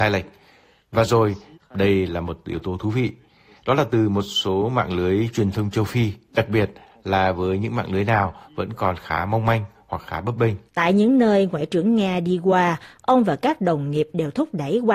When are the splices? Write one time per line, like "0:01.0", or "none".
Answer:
0:01.5
0:10.7